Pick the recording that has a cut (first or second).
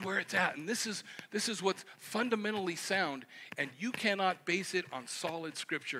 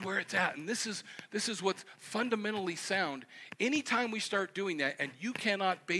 first